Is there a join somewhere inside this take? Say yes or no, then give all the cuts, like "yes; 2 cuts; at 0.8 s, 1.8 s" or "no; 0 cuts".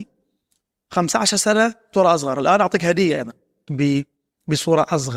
yes; 1 cut; at 3.7 s